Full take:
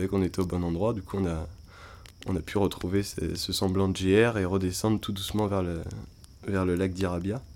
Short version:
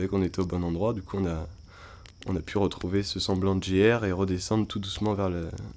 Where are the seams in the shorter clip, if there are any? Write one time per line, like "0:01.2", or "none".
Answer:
0:03.0

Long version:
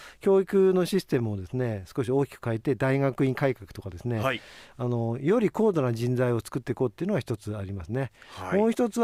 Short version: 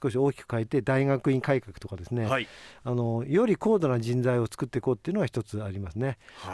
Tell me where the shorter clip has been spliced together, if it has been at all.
none

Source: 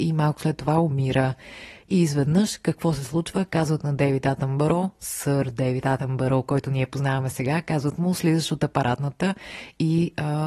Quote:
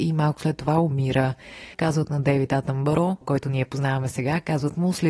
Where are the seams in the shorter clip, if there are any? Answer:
0:01.7
0:03.2

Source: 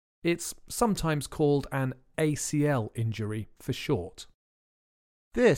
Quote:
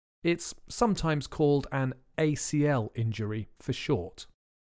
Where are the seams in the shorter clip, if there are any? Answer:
none

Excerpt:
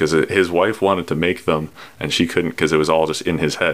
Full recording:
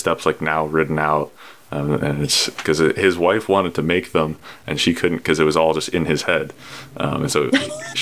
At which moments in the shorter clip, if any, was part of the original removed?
none

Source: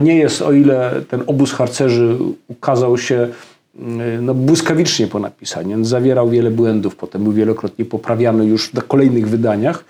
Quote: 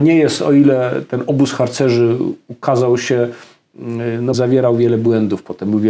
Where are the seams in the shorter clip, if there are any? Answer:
0:04.3

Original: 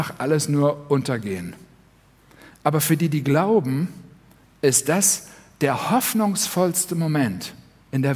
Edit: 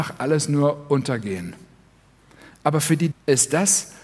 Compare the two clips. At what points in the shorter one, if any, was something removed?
0:03.1

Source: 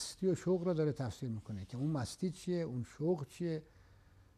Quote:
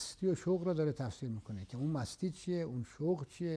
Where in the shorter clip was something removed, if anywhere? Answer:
none

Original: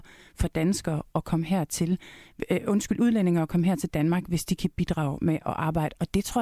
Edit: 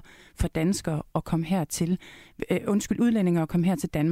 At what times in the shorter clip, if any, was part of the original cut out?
none

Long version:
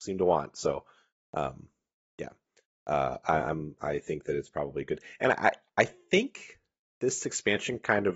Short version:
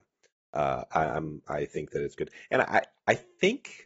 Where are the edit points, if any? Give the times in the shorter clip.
0:02.2

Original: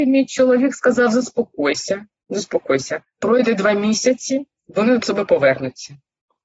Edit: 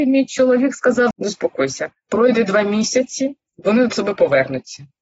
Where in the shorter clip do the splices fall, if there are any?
0:01.1

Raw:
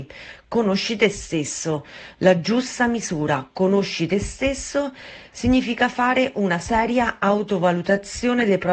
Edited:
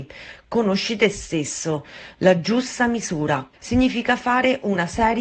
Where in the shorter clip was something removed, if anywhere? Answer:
0:03.5

